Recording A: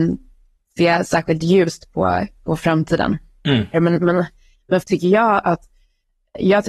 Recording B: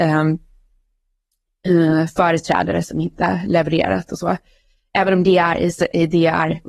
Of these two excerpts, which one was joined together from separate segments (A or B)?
A